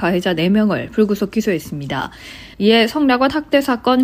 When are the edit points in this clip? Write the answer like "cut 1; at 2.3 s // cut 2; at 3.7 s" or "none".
cut 1; at 2.5 s

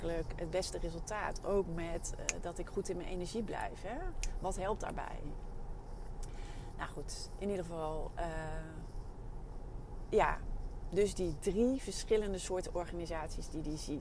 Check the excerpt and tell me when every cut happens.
none

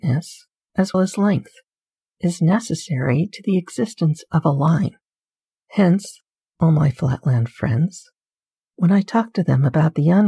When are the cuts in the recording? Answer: cut 1; at 0.9 s // cut 2; at 5.7 s

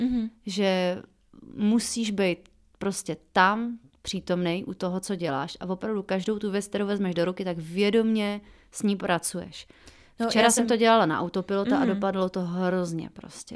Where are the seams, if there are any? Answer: none

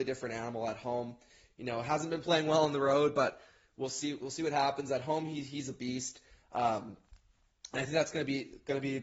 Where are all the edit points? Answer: none

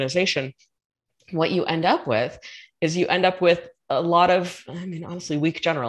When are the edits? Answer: none

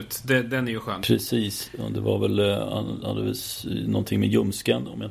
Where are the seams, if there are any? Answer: cut 1; at 1.0 s

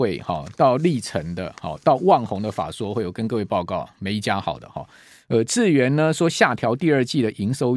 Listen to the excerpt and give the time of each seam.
none

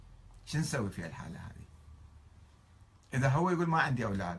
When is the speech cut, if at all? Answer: none

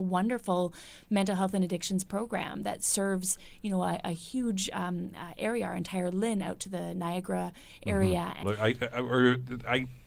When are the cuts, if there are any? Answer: cut 1; at 8.4 s

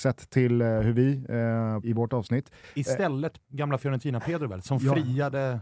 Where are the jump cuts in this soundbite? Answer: cut 1; at 1.8 s // cut 2; at 3.4 s

